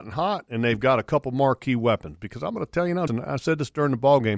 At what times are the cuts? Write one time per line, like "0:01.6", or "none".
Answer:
0:03.1

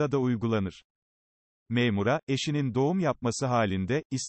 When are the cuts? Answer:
none

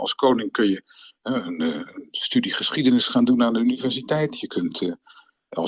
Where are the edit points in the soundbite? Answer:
none

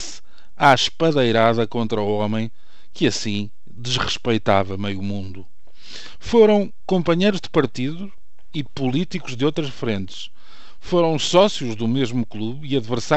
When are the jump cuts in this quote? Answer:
none

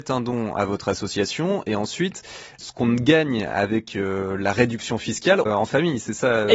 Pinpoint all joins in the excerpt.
0:05.5

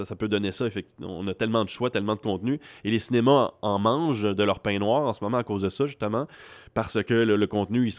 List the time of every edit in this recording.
none

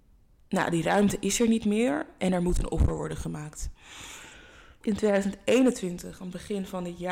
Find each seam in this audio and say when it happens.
0:04.8

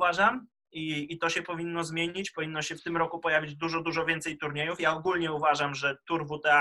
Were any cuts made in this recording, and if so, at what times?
none

